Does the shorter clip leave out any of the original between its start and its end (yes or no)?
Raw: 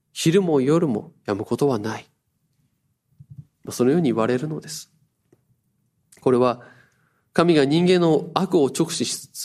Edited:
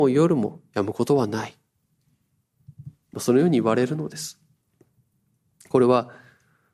no